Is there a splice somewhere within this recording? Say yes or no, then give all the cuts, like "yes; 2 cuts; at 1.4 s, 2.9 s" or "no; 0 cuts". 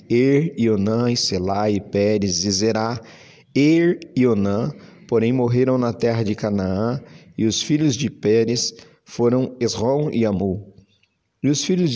no; 0 cuts